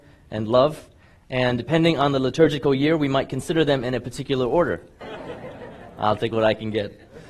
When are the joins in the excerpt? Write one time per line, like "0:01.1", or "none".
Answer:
0:01.6
0:05.0